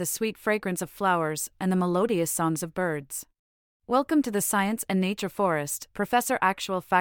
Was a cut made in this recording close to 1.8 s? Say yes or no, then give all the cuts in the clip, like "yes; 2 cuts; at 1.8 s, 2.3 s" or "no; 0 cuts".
no; 2 cuts; at 3.8 s, 5.9 s